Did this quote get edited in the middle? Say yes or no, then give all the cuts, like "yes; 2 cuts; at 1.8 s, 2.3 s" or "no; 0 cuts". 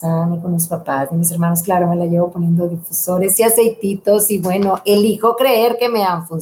no; 0 cuts